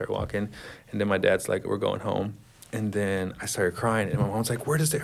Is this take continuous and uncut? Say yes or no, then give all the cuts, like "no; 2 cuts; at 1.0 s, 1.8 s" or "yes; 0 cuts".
no; 1 cut; at 1.6 s